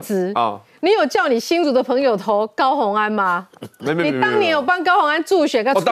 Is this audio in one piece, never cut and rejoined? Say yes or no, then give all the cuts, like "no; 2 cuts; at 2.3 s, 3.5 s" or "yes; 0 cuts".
yes; 0 cuts